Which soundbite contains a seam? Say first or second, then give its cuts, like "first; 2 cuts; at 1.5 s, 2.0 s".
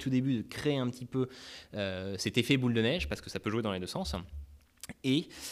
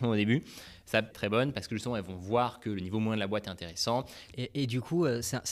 second; 2 cuts; at 1.1 s, 4.3 s